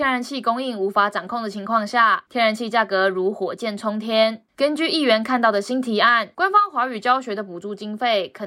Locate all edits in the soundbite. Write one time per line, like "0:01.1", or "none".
0:04.5

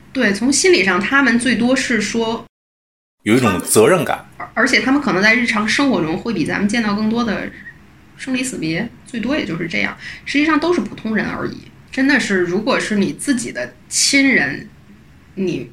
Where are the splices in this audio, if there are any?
0:11.9
0:13.8

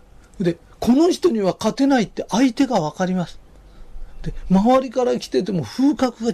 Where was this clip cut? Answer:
none

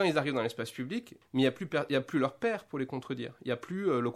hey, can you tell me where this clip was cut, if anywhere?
0:01.2

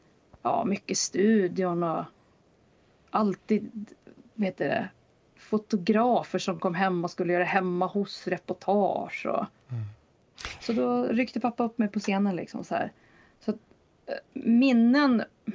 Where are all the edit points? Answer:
0:10.6

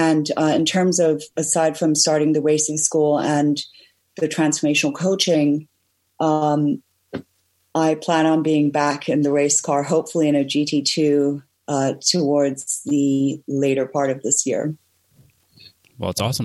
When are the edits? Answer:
none

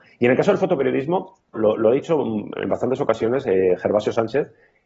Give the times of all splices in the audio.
0:01.5

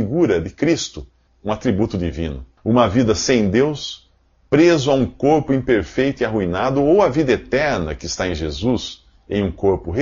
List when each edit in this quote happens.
0:01.3
0:02.6

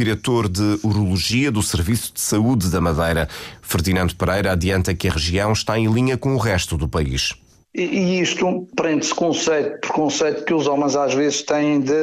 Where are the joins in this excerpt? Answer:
0:07.6

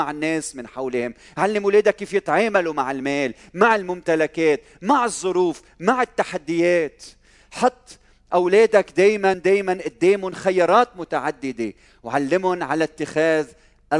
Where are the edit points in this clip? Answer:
0:09.3

